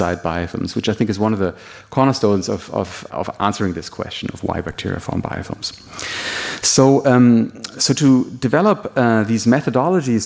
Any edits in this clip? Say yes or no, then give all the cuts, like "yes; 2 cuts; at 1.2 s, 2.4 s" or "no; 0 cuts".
yes; 1 cut; at 3.1 s